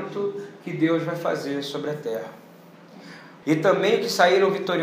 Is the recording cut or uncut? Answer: cut